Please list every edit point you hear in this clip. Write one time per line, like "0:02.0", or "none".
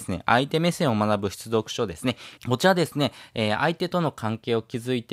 0:02.4